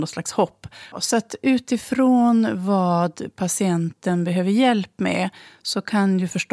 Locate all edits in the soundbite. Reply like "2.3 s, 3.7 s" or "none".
0.9 s